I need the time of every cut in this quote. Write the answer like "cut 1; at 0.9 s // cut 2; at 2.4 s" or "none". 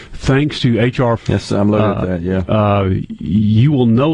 cut 1; at 1.2 s